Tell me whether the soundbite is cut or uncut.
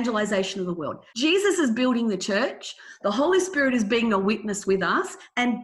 cut